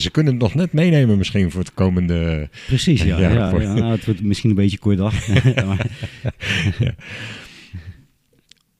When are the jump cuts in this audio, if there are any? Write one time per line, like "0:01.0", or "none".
none

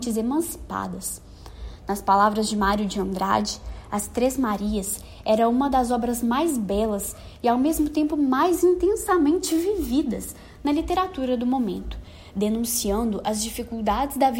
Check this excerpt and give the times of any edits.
none

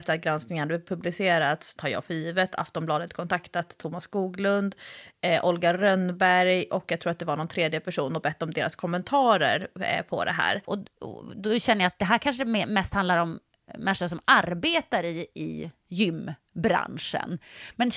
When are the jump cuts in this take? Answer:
0:01.8
0:10.6

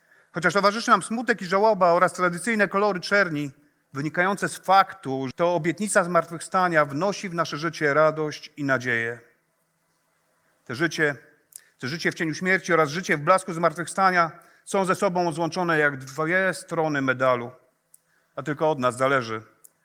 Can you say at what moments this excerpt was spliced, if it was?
0:05.3

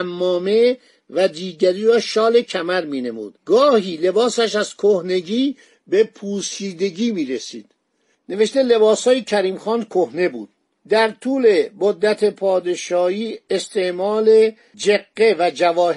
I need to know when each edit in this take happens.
0:03.4

